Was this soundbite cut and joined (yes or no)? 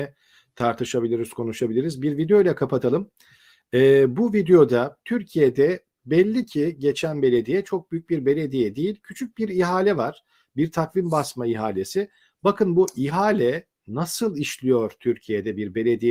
no